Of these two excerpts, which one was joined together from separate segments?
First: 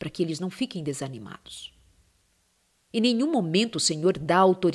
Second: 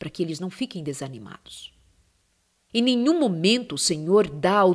second; 1 cut; at 2.7 s

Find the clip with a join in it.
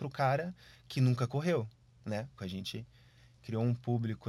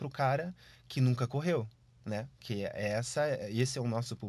first; 1 cut; at 2.4 s

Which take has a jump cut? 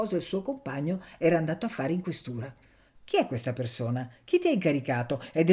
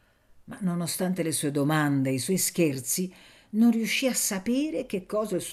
first; 1 cut; at 2.9 s

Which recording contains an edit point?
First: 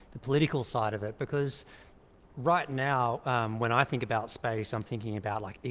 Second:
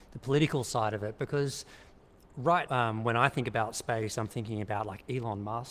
second; 1 cut; at 2.7 s

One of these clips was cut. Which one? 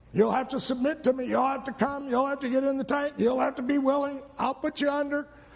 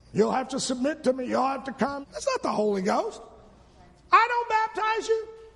second; 1 cut; at 2.0 s

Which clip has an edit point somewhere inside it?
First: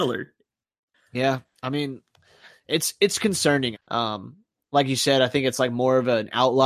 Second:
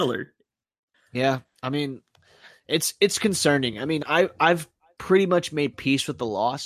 first; 1 cut; at 3.7 s

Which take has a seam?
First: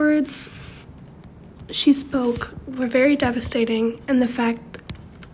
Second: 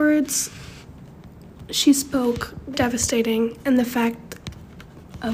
second; 1 cut; at 2.7 s

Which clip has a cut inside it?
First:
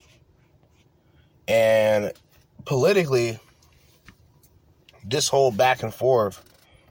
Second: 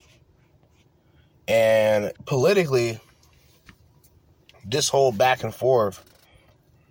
second; 1 cut; at 2.2 s

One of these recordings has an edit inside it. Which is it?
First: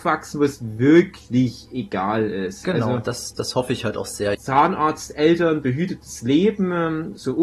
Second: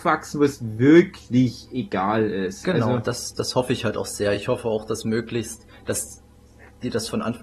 first; 1 cut; at 4.3 s

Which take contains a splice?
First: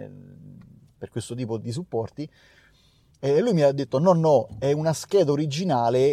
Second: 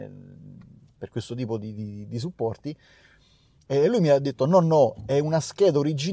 first; 1 cut; at 1.6 s

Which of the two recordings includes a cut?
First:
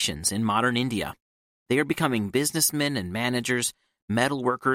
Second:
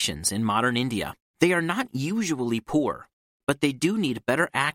second; 1 cut; at 1.3 s

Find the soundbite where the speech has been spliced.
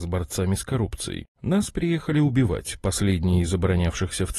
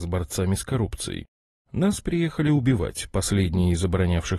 first; 1 cut; at 1.3 s

